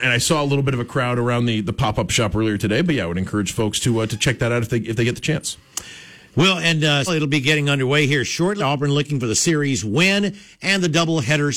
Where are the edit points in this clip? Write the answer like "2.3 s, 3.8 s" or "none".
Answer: 7.1 s, 8.6 s